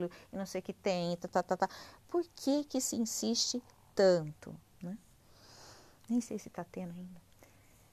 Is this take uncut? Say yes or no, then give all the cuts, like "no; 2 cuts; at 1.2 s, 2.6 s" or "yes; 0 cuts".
no; 1 cut; at 4.7 s